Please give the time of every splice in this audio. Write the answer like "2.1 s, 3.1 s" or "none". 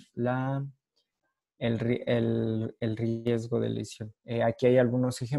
4.2 s

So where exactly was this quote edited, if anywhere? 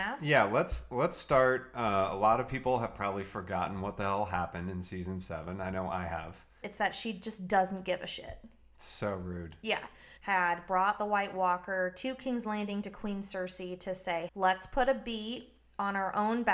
6.6 s, 10.2 s, 14.3 s

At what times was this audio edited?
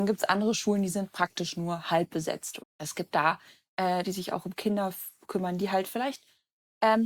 2.6 s, 4.0 s

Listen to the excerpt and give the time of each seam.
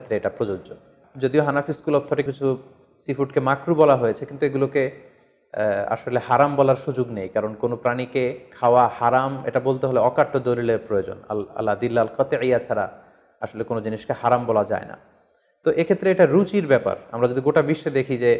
2.3 s

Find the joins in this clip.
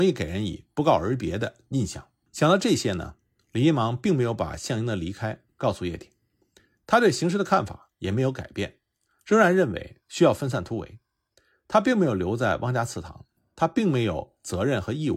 2.3 s, 13.4 s

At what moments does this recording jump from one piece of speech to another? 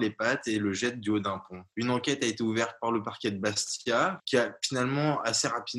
1.7 s, 4.2 s

